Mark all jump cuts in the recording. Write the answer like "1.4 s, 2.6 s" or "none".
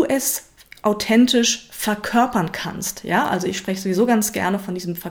none